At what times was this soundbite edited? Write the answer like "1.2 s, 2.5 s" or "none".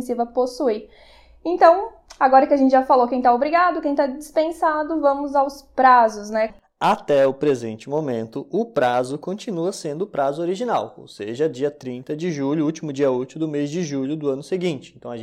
6.5 s

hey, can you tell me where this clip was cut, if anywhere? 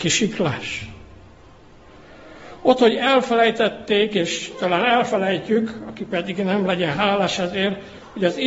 none

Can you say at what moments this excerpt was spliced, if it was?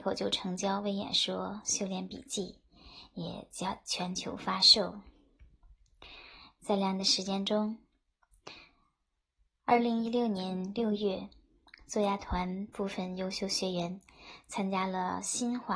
none

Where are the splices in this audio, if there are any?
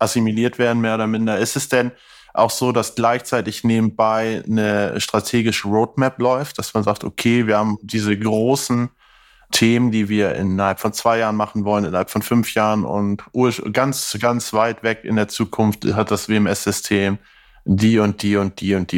none

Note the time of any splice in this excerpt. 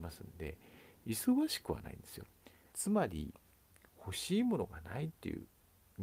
2.7 s

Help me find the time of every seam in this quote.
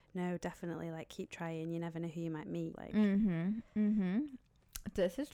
2.7 s

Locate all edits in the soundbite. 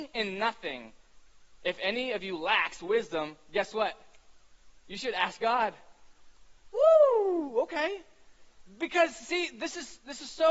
none

